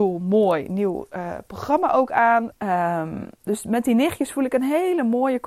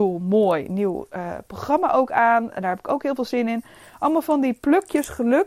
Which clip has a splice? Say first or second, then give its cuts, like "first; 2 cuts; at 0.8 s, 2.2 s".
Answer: first; 1 cut; at 2.5 s